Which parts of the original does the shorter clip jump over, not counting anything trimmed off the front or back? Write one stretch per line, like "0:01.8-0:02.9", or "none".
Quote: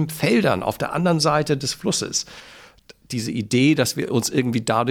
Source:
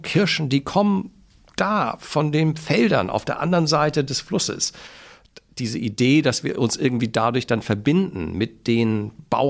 none